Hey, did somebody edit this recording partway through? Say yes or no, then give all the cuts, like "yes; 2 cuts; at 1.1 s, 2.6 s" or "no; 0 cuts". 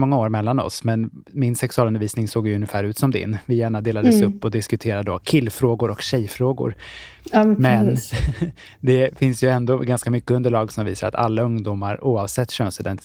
no; 0 cuts